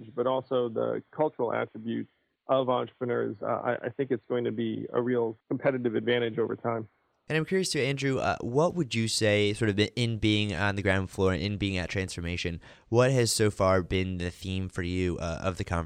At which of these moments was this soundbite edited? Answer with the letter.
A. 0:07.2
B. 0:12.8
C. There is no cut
C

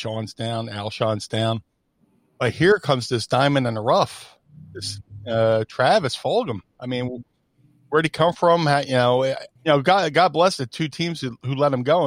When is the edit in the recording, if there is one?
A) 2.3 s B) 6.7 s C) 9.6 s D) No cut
C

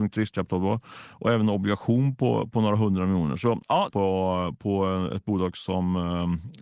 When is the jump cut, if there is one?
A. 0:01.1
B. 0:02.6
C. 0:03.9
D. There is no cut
C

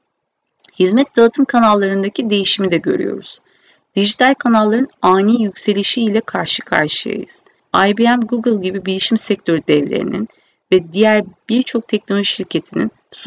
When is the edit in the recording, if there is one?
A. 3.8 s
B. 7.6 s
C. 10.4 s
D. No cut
B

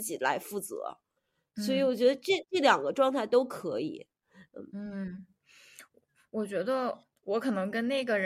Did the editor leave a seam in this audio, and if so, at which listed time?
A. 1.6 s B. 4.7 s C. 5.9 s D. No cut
D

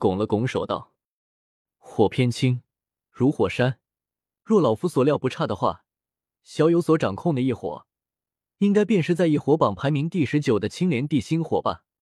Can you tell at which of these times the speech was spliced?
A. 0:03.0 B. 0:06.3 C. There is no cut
A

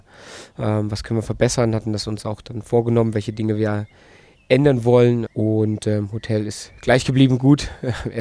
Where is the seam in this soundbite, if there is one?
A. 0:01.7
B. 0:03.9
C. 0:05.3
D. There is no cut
C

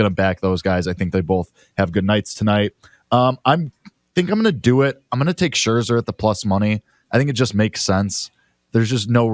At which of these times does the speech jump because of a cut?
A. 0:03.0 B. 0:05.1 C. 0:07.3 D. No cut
D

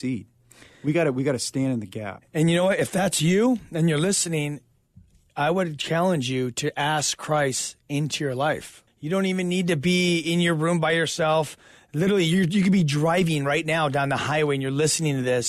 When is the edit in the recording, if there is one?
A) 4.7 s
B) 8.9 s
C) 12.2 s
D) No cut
B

